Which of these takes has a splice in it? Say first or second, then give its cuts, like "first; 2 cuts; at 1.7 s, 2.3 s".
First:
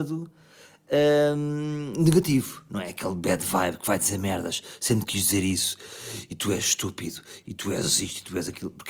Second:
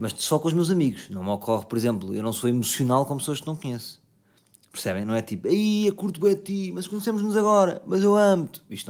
first; 2 cuts; at 6.3 s, 7.4 s